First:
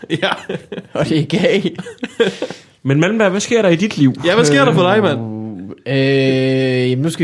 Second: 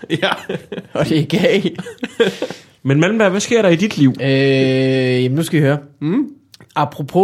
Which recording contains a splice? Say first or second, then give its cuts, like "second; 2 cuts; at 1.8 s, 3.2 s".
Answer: second; 1 cut; at 4.2 s